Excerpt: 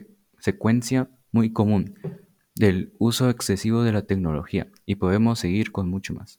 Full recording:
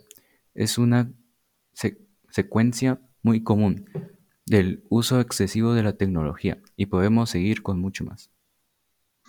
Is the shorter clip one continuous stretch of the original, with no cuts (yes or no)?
yes